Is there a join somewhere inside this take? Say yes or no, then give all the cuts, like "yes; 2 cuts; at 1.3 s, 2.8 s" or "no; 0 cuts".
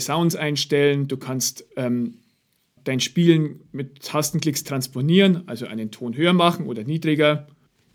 yes; 1 cut; at 2.8 s